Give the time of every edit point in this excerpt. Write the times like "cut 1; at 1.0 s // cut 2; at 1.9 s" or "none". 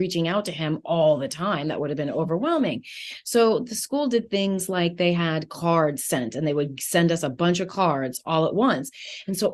none